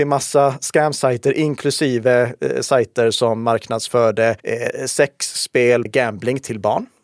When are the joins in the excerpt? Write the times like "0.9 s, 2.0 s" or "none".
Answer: 4.4 s, 5.9 s

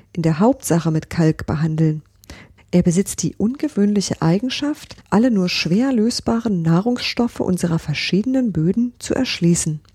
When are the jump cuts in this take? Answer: 2.6 s, 5.0 s

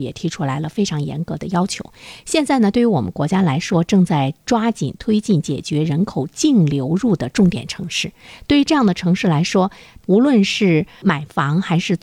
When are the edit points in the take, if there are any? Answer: 10.0 s

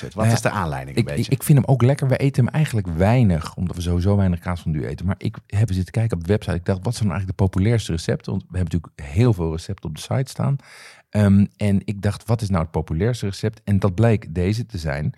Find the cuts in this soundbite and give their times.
5.7 s

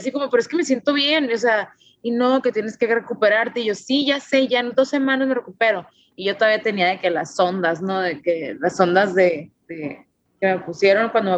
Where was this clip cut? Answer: none

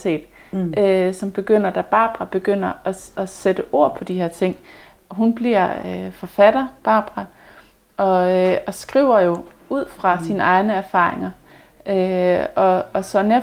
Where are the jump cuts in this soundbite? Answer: none

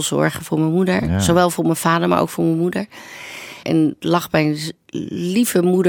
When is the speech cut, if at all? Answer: 3.6 s

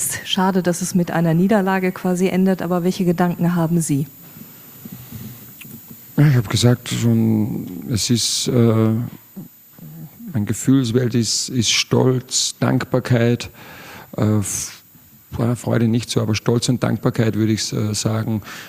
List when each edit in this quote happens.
none

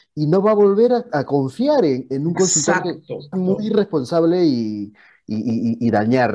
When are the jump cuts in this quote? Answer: 3.3 s

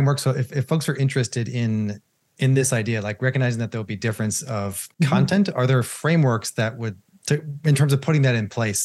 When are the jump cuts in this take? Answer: 4.9 s

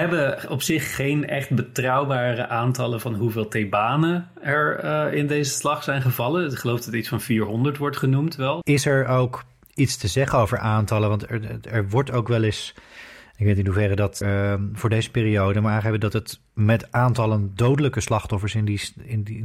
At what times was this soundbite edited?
8.6 s, 14.2 s

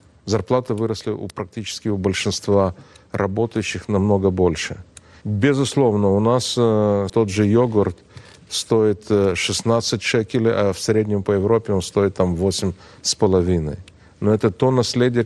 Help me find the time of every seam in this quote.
5.2 s, 7.1 s

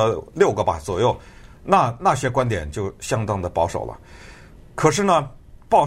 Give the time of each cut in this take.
none

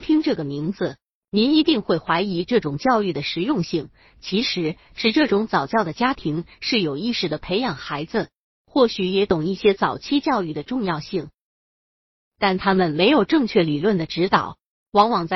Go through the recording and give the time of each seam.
none

